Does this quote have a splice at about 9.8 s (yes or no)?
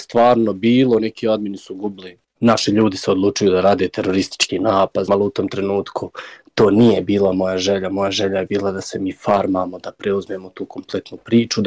no